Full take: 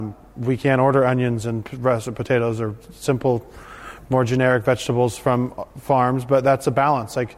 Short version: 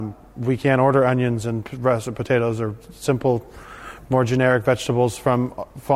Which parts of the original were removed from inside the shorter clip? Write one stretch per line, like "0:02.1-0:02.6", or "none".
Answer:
none